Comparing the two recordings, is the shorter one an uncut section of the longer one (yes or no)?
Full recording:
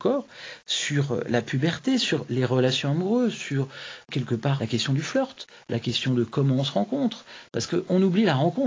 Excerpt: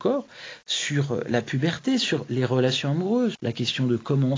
no